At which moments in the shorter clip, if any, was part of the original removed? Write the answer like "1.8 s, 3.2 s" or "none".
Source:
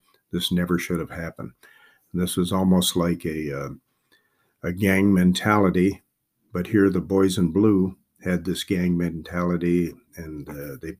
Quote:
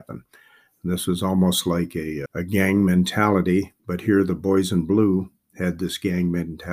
2.3 s, 3.8 s